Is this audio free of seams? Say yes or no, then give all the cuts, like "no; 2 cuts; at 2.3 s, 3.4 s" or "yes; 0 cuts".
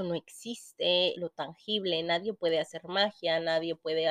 no; 1 cut; at 1.1 s